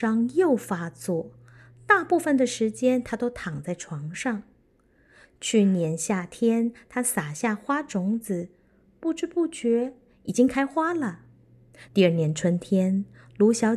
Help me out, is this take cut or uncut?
cut